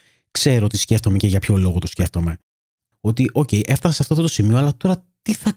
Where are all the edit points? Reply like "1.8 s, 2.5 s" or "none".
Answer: 2.9 s